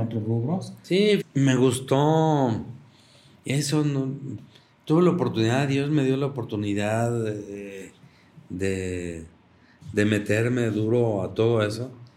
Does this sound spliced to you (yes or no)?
yes